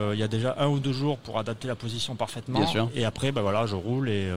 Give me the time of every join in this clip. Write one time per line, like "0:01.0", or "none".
none